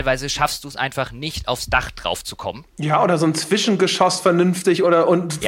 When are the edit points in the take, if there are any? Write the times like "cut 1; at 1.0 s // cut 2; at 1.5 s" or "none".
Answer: none

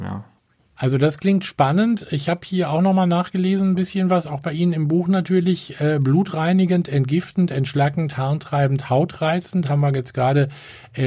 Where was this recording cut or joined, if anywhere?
none

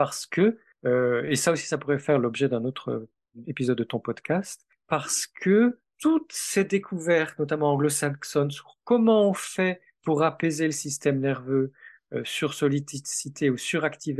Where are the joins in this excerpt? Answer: none

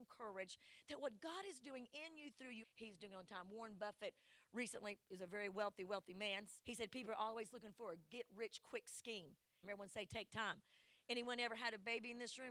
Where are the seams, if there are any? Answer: cut 1; at 2.6 s // cut 2; at 6.6 s // cut 3; at 9.6 s

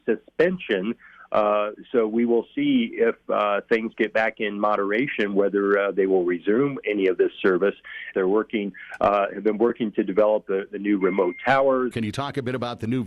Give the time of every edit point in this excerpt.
cut 1; at 8.1 s // cut 2; at 11.9 s

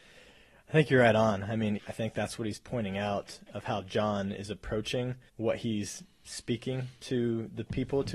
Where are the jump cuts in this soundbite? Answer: cut 1; at 1.8 s // cut 2; at 5.3 s

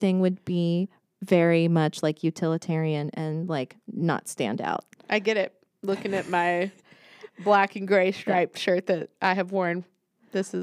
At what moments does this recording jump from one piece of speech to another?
none

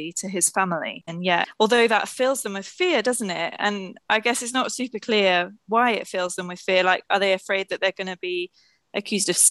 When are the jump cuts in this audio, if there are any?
cut 1; at 1.1 s

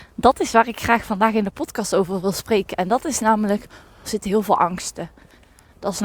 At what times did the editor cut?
cut 1; at 4.0 s

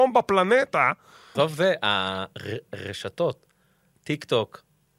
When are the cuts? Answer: cut 1; at 1.4 s

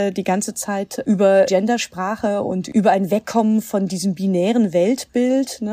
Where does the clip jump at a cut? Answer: cut 1; at 1.5 s

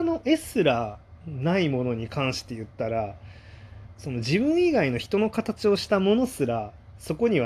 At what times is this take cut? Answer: cut 1; at 3.9 s

